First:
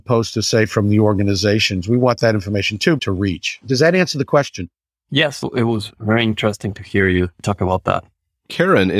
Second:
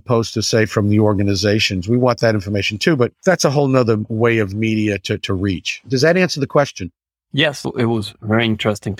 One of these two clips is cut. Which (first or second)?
first